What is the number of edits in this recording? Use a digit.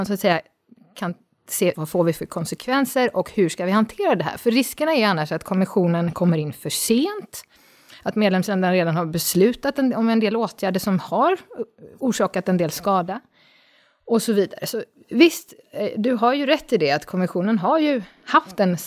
1